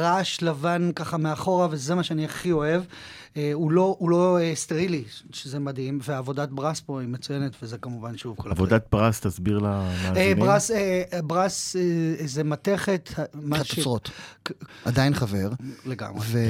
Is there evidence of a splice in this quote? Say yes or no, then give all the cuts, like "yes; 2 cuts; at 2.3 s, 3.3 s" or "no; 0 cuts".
yes; 1 cut; at 14.7 s